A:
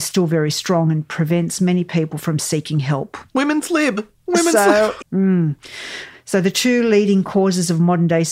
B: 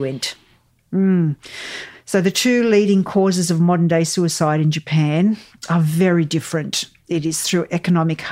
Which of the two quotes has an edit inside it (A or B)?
A